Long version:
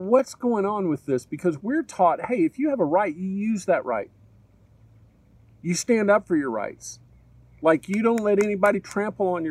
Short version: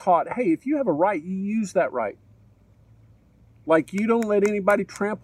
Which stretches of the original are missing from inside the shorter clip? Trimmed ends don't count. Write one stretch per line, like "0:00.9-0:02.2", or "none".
0:05.6-0:07.6